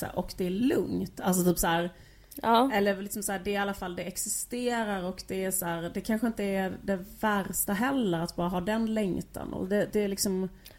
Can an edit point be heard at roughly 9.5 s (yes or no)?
no